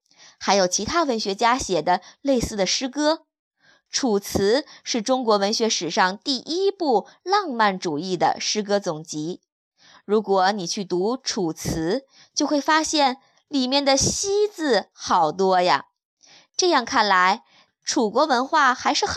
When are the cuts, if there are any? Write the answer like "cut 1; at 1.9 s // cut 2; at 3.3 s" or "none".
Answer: cut 1; at 17.7 s